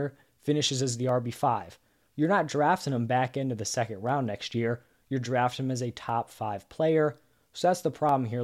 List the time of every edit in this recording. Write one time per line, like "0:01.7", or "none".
none